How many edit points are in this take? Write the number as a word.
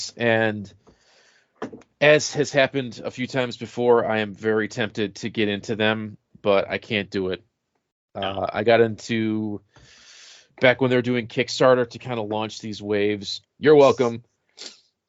one